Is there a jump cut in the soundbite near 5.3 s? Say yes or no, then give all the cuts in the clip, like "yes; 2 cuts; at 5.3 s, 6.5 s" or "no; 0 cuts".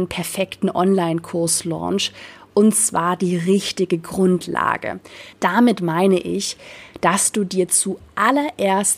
yes; 1 cut; at 5.3 s